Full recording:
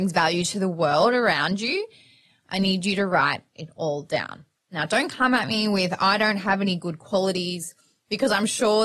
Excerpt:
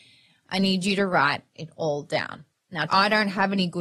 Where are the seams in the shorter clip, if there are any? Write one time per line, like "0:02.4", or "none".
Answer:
0:02.9

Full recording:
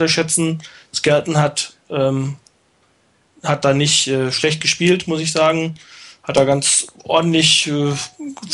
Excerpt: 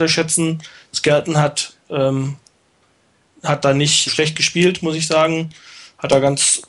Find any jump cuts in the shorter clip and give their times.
0:04.1

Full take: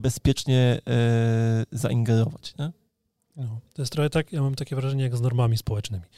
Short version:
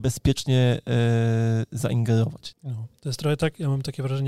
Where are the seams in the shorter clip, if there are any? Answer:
0:02.5

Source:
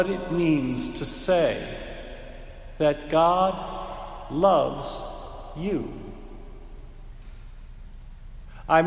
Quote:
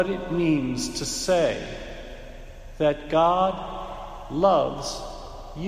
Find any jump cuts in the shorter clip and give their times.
none

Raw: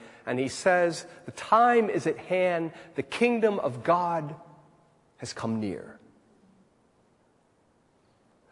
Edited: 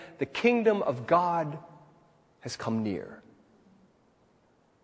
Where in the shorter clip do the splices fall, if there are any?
none

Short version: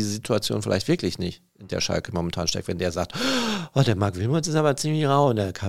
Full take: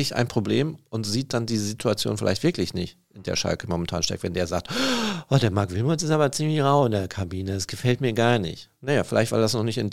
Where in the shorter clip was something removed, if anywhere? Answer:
none

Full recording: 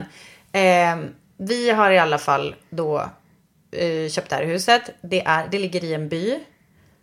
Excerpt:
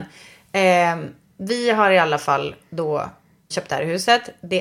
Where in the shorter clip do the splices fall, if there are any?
0:03.5

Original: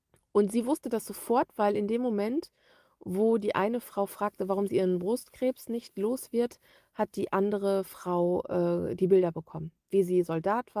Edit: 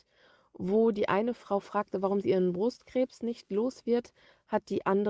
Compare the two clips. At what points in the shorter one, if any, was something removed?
none

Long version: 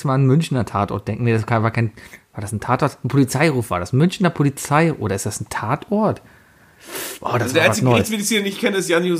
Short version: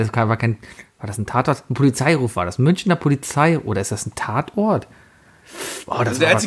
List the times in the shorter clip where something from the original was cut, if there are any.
none

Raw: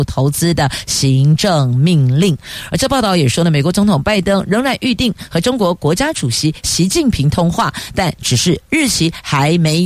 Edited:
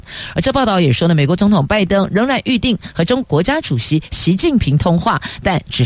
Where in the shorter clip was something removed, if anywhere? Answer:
0:03.2

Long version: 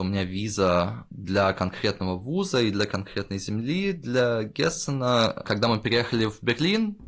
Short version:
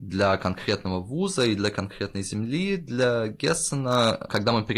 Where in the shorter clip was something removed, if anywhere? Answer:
none

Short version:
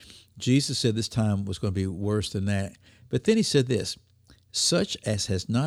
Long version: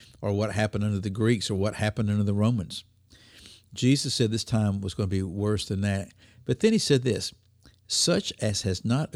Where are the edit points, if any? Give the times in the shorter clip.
none

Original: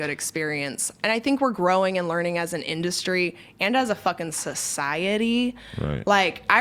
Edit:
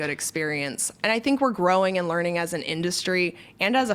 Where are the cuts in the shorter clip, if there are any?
none

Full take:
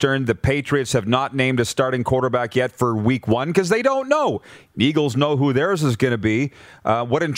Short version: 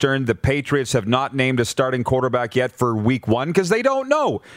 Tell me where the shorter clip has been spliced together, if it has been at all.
none

